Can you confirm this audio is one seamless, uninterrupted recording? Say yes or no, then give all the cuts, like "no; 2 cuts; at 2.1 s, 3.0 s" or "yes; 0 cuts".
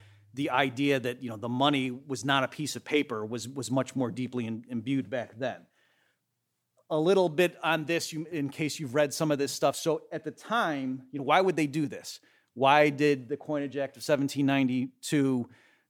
yes; 0 cuts